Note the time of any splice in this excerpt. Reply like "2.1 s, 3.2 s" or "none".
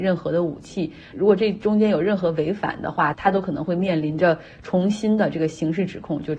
3.1 s